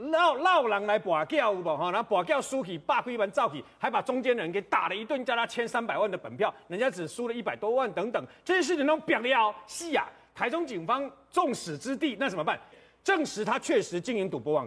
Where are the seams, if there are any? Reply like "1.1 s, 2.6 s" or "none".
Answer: 12.7 s

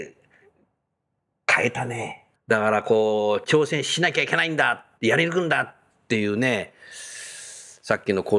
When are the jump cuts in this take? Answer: 2.3 s, 4.9 s

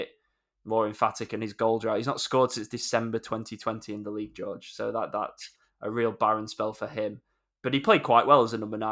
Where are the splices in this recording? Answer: none

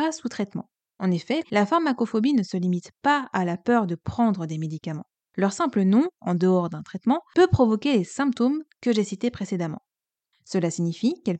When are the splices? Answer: 1.4 s, 10.3 s

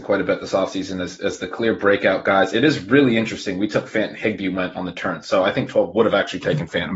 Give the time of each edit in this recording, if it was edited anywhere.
none

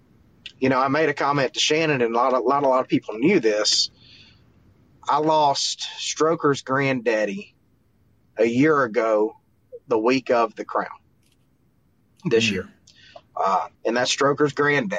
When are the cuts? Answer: 13.7 s

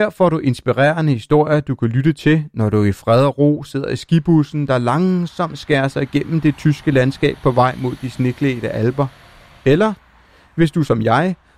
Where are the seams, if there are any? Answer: none

